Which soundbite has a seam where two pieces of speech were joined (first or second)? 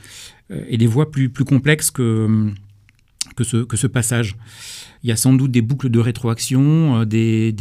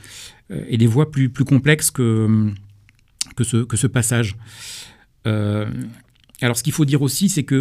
first